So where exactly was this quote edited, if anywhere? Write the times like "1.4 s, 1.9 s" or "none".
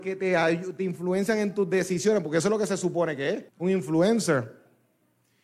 3.5 s